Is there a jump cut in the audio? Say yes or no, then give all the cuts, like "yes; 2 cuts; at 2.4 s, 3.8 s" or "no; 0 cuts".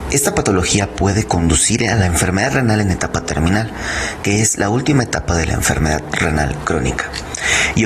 no; 0 cuts